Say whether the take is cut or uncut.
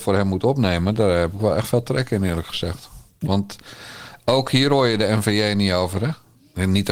cut